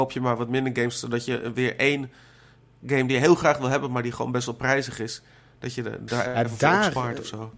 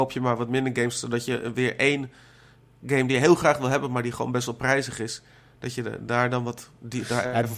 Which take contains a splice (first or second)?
first